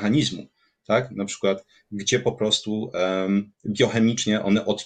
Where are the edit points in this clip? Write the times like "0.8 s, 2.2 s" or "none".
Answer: none